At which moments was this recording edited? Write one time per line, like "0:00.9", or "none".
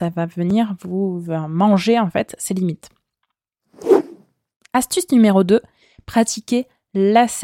none